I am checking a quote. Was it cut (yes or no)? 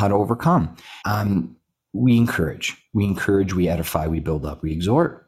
yes